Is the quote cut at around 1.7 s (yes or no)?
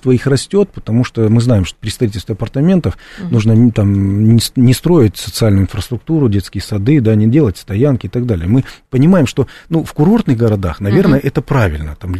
yes